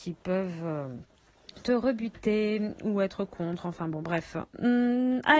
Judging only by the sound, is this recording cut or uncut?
uncut